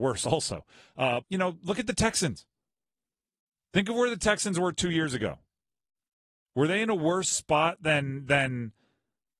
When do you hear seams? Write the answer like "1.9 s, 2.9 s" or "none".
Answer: 1.2 s

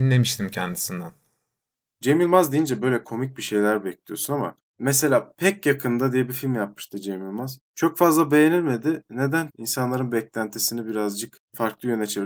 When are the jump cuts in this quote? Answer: 9.5 s

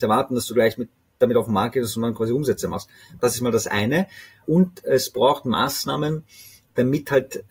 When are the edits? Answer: 3.2 s

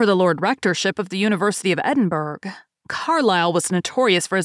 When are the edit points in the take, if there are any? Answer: 2.8 s

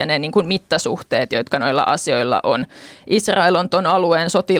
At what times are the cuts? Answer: none

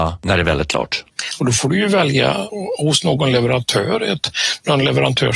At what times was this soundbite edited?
1.4 s

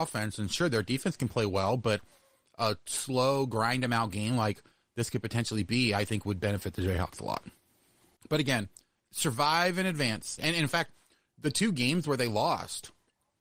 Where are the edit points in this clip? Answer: 8.2 s, 10.4 s

